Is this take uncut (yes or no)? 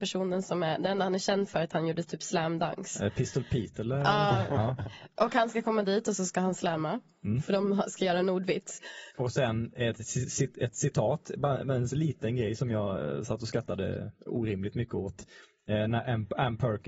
no